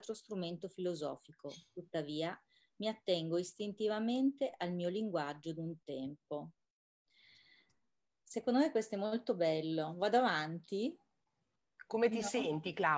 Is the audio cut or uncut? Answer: uncut